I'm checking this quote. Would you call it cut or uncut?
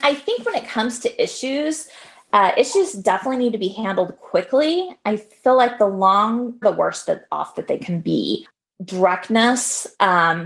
cut